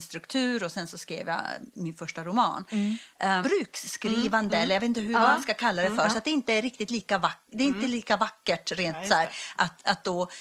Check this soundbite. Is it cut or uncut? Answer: cut